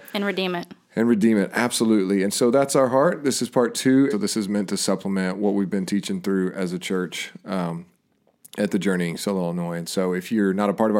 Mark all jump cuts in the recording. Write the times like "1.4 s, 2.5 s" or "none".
4.1 s

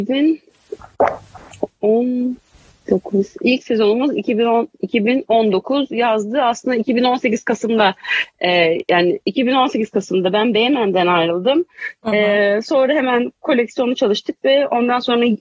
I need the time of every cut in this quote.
none

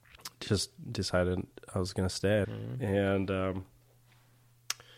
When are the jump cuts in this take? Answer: 2.4 s

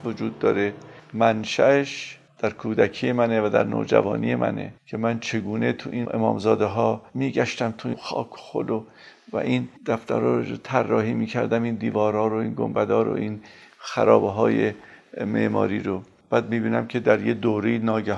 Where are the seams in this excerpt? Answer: 4.8 s, 9.8 s

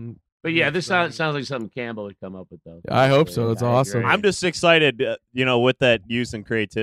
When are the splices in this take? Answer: none

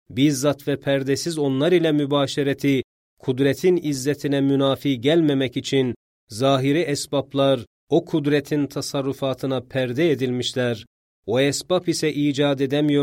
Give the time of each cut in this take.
none

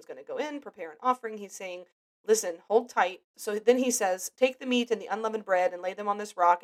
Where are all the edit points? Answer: 3.3 s

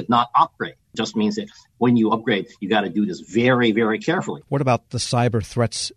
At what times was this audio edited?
4.4 s

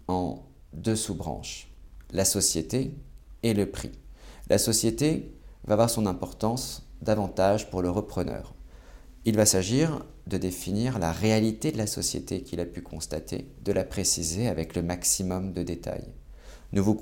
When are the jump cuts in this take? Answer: none

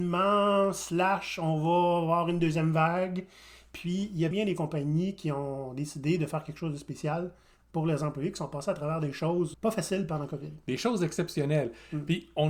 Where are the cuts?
4.3 s, 9.5 s

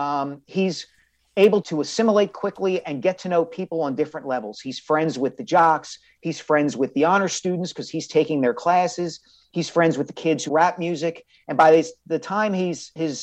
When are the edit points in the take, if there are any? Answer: 1.6 s, 10.5 s

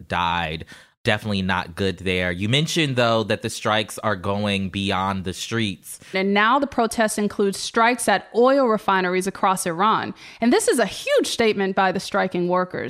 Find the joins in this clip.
6.1 s

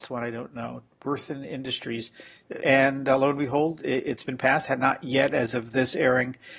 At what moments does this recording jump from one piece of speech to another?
2.6 s

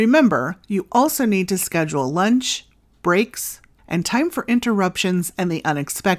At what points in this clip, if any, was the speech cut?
3.8 s

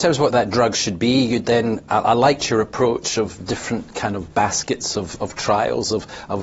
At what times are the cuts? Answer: none

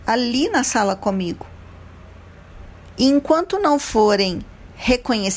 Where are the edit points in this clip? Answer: 2.9 s

